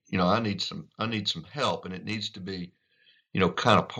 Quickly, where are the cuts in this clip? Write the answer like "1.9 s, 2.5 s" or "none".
none